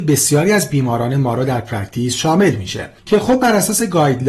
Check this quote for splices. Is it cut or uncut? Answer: cut